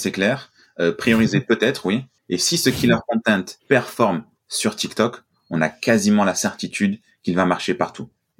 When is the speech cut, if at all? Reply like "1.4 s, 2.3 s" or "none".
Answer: 2.2 s, 3.6 s